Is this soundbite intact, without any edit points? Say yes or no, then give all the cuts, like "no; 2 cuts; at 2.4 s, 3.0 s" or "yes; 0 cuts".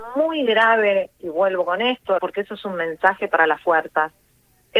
no; 1 cut; at 2.2 s